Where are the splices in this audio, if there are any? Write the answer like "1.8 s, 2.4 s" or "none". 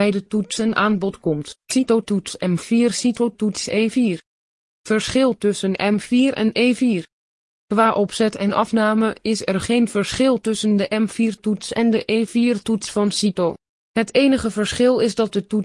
1.6 s